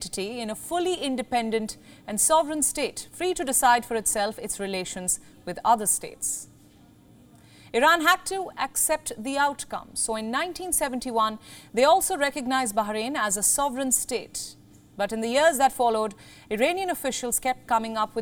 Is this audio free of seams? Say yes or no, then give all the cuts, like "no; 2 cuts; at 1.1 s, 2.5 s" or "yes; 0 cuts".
yes; 0 cuts